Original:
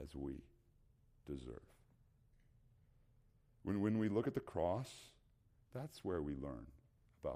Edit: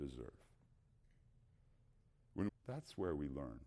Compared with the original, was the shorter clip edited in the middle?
yes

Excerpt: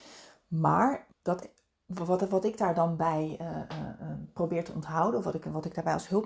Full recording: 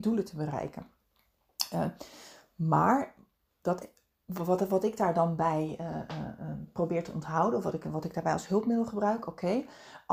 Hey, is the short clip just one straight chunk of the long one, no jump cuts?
no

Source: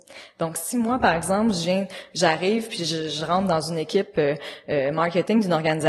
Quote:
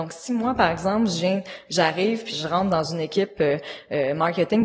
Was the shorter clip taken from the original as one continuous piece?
no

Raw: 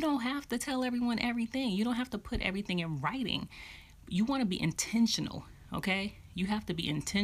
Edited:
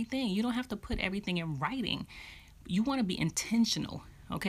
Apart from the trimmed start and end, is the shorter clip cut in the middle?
no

